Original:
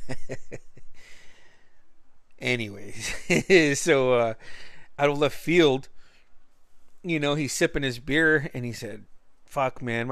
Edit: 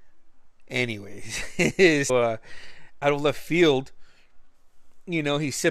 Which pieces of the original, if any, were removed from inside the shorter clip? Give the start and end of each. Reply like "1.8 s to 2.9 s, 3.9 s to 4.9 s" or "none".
3.8 s to 4.1 s